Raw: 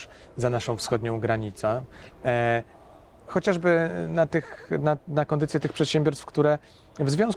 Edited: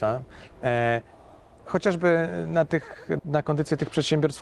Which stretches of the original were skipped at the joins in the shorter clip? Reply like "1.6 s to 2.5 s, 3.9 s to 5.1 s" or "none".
4.8 s to 5.0 s